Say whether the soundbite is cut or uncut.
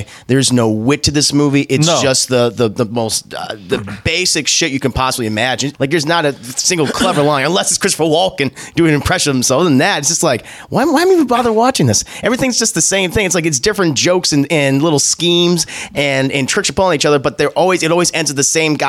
cut